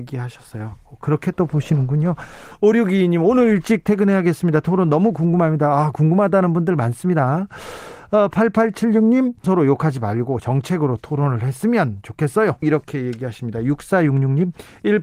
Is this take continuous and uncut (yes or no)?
no